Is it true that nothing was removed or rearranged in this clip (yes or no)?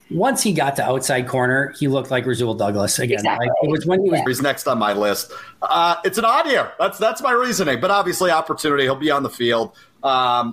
no